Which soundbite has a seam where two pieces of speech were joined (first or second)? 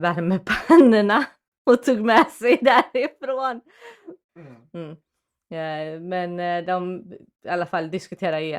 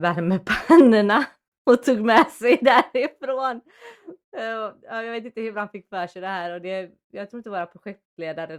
first